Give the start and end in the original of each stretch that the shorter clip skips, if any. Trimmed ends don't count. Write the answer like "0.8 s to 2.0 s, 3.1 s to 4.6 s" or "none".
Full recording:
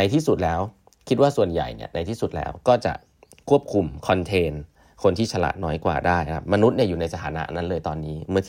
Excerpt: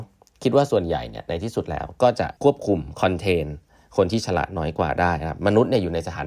3.0 s to 3.4 s